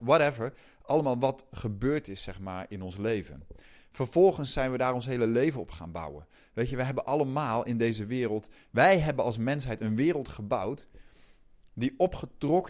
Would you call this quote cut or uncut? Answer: uncut